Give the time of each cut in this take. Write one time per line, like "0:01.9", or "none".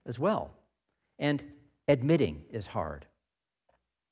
none